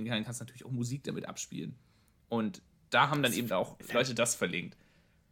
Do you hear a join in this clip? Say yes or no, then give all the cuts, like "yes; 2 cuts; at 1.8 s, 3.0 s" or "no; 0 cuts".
no; 0 cuts